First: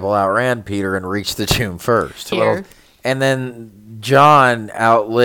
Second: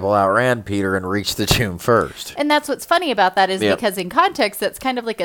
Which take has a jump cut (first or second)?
first